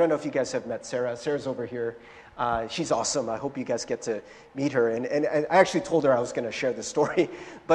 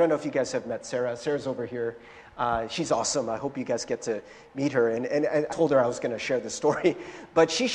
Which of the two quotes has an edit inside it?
second; 1 cut; at 5.5 s

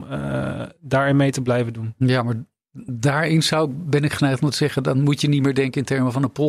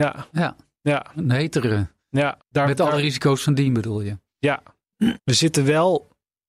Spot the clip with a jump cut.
second; 2 cuts; at 2.4 s, 5.2 s

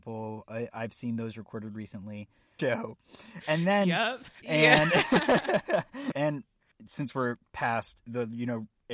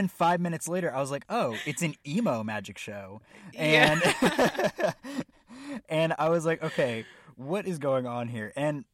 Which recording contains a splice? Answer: first; 3 cuts; at 2.6 s, 4.4 s, 6.1 s

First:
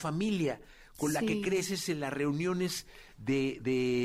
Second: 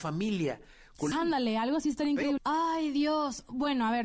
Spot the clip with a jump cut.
second; 2 cuts; at 1.1 s, 2.4 s

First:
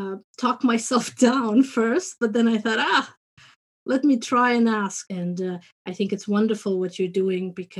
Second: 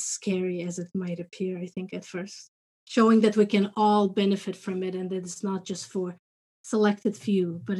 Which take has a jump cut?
first; 1 cut; at 5.1 s

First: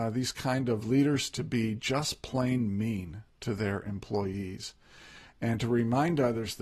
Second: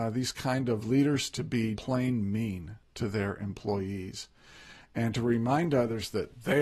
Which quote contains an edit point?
second; 1 cut; at 1.8 s

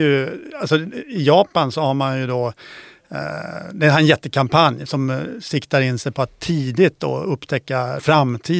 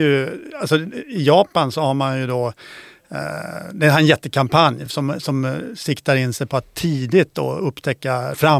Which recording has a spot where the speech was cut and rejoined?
first; 1 cut; at 4.9 s

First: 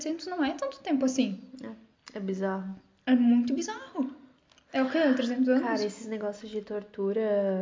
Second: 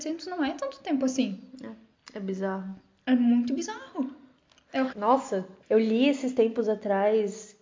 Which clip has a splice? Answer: second; 1 cut; at 4.9 s

